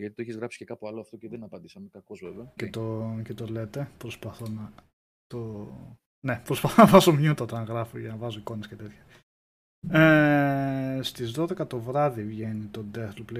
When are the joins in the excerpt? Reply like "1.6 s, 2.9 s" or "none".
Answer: 2.6 s